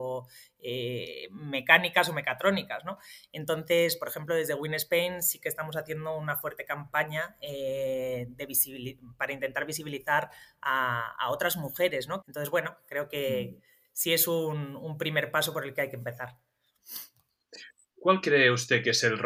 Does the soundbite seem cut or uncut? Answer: cut